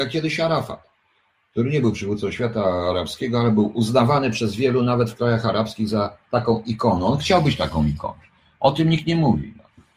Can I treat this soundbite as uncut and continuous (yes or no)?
yes